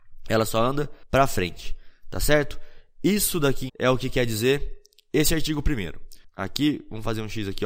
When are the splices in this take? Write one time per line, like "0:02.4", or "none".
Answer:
0:03.7
0:06.3

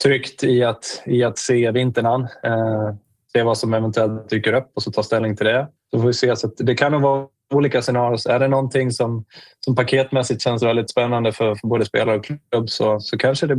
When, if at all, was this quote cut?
0:05.8

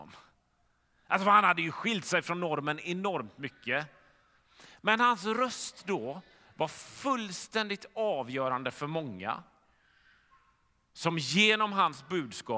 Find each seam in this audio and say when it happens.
none

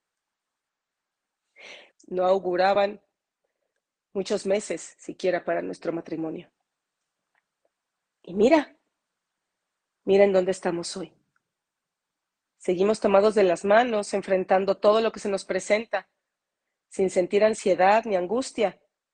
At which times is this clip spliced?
0:01.9

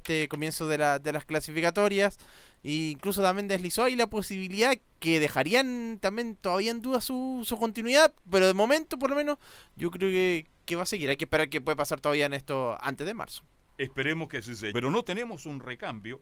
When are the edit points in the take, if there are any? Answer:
0:14.7

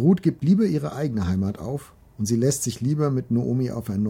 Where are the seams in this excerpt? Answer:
0:02.0

